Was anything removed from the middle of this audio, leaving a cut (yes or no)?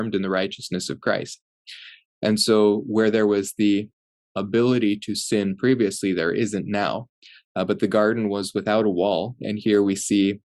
no